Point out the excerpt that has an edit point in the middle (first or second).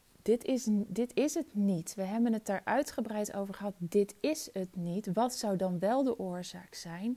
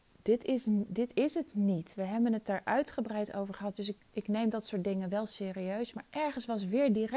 second